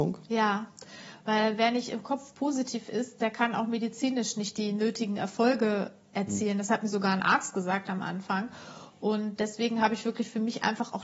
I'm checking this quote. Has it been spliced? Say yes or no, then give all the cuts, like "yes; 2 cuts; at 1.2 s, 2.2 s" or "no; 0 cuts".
no; 0 cuts